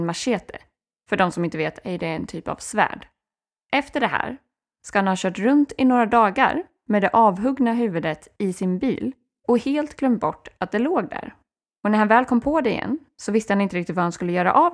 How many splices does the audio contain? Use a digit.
0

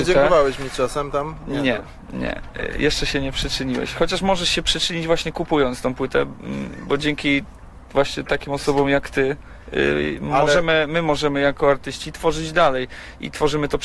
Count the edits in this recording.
0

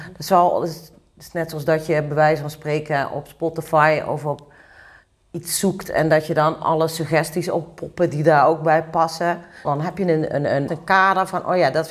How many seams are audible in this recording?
2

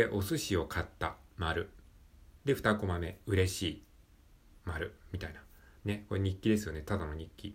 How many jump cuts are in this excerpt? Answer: 1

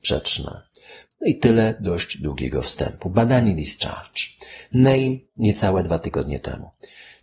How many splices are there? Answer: 1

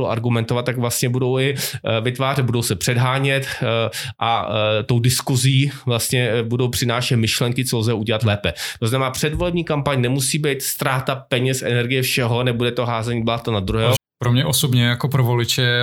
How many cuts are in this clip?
1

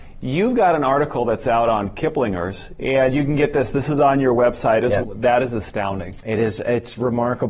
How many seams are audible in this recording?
1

